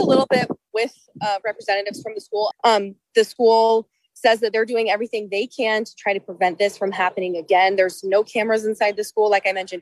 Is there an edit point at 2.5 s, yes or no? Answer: yes